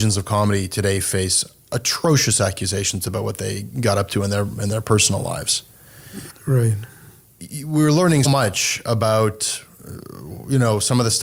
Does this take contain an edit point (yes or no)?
yes